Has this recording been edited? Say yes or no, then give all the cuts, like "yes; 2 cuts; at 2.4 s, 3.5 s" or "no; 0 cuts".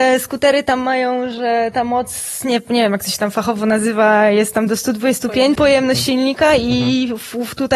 yes; 1 cut; at 5.6 s